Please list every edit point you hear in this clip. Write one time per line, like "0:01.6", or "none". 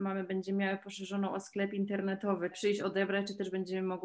0:02.5